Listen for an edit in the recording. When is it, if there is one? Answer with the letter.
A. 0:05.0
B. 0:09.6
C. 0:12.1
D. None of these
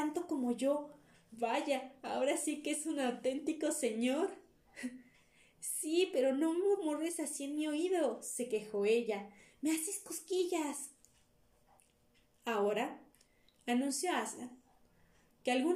D